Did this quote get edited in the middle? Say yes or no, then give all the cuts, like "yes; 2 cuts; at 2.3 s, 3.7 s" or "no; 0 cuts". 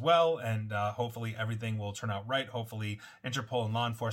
no; 0 cuts